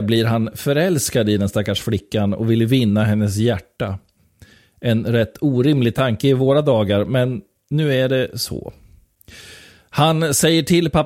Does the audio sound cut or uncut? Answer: uncut